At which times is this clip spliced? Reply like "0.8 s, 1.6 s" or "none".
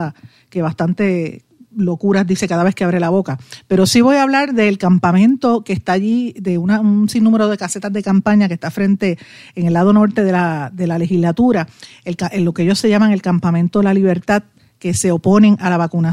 none